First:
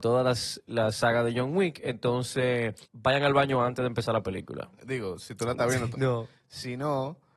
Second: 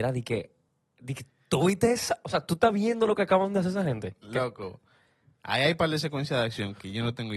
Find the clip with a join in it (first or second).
first